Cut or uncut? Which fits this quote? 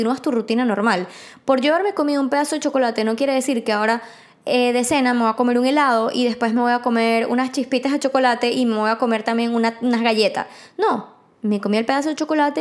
uncut